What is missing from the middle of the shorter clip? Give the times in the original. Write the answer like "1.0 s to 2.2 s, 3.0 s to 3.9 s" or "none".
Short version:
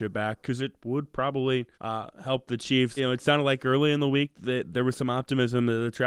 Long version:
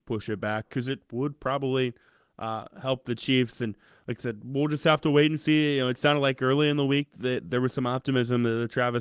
2.0 s to 2.3 s, 3.5 s to 5.7 s